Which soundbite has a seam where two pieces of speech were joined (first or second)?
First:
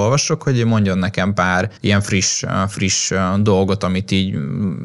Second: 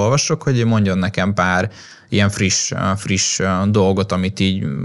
first